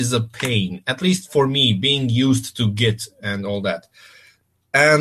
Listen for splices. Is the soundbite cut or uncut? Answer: uncut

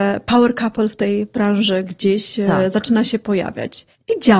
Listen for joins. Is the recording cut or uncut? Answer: uncut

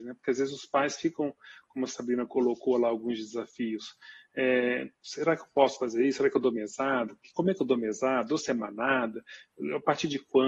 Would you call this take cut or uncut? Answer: uncut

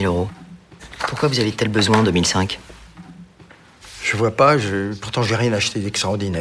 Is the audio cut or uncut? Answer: uncut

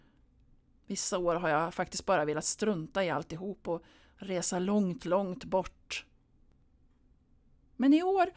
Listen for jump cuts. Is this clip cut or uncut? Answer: uncut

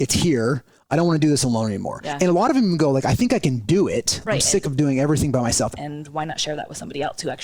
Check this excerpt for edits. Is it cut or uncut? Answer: cut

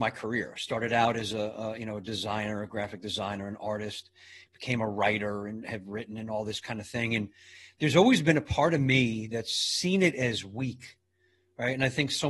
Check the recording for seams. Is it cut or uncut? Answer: uncut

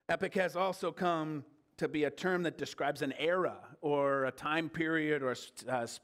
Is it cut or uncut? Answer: uncut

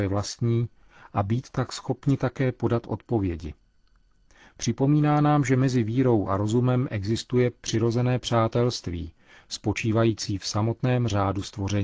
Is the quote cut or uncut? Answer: uncut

